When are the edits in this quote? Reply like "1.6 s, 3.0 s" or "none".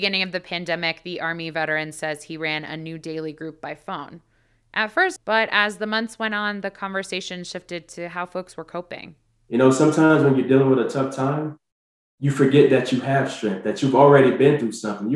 5.2 s